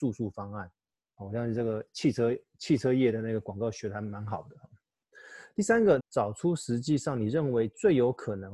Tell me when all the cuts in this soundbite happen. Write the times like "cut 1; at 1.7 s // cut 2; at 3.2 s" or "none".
cut 1; at 1.1 s // cut 2; at 6.0 s